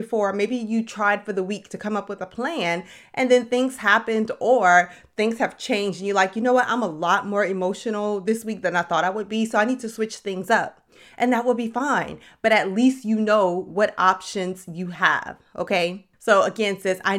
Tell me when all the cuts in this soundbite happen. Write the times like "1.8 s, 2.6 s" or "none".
none